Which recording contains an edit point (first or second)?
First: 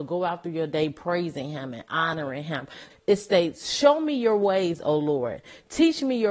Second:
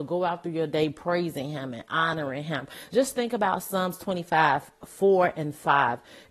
first